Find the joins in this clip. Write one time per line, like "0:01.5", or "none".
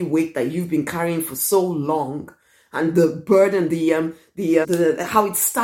0:04.6